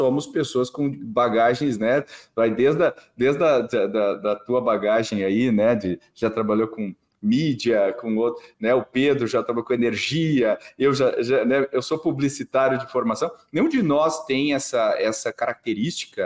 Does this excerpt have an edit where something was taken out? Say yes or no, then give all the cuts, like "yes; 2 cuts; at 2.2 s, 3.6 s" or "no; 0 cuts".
no; 0 cuts